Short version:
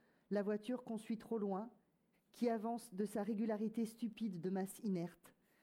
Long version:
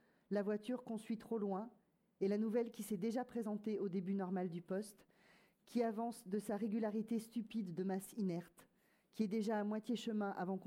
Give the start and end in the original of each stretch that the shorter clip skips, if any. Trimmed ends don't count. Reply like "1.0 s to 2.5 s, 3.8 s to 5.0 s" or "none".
2.1 s to 5.5 s